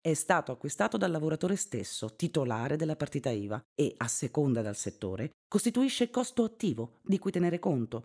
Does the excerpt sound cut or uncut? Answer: uncut